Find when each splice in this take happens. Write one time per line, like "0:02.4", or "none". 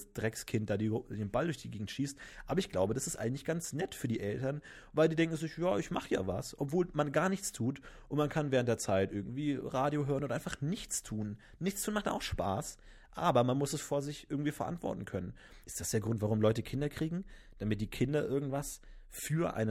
0:15.6